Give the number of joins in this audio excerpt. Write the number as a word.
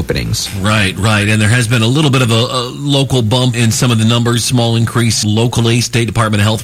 two